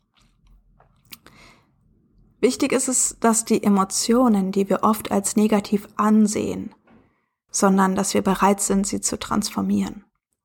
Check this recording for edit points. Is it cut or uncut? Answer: cut